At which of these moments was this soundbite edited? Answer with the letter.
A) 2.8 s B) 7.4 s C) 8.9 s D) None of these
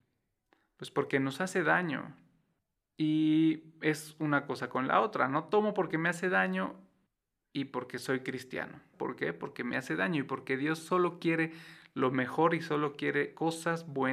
C